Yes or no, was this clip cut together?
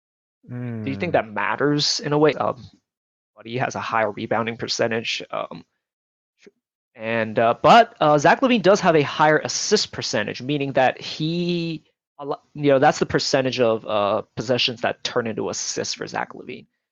yes